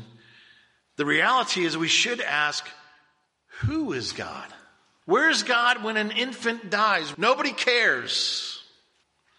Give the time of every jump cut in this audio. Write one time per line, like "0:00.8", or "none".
0:05.0
0:07.1